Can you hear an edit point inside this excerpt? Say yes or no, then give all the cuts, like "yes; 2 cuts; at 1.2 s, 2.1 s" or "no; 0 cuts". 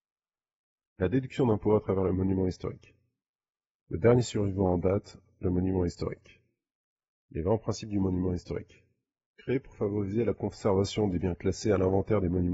yes; 1 cut; at 3.8 s